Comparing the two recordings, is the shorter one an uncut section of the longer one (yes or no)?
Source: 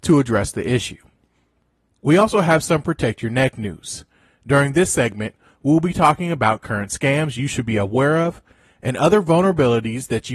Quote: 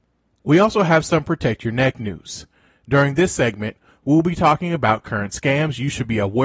yes